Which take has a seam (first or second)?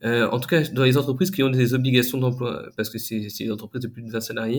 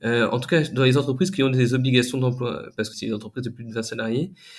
second